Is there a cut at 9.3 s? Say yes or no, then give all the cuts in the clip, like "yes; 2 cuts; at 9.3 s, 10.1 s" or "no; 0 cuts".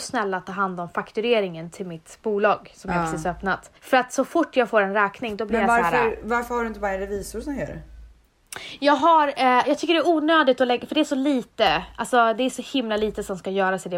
no; 1 cut; at 3.8 s